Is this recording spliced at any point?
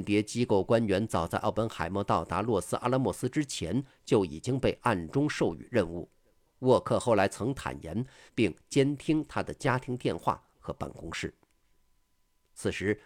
yes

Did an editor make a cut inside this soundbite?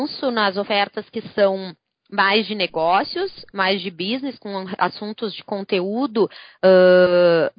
no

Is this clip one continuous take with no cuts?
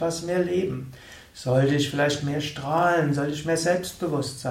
yes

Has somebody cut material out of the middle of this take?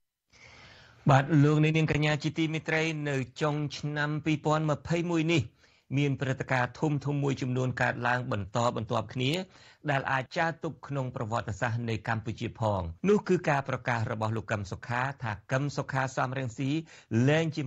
yes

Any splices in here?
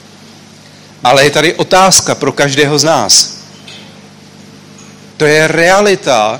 yes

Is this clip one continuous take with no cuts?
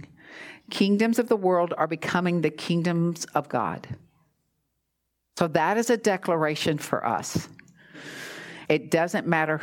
no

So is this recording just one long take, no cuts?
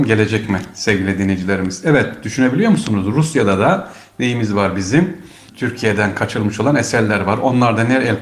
yes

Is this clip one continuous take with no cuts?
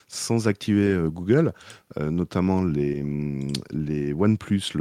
yes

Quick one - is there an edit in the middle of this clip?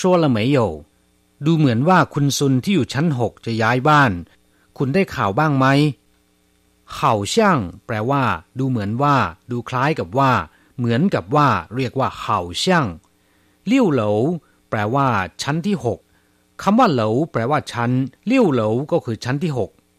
yes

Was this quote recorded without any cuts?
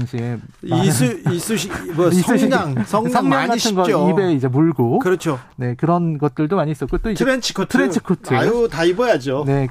yes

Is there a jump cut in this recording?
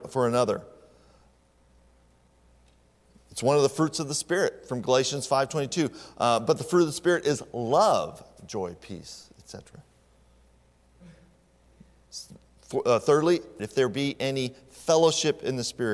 yes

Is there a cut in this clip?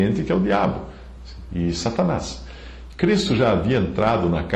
yes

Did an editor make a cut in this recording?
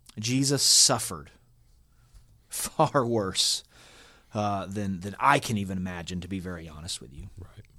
no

